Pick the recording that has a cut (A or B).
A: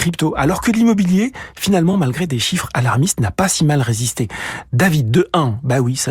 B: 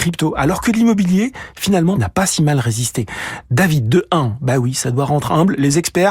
B